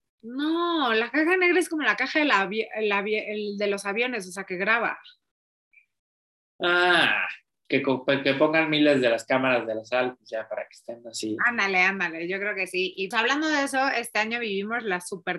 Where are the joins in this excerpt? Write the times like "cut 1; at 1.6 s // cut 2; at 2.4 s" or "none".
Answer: cut 1; at 7.7 s // cut 2; at 13.1 s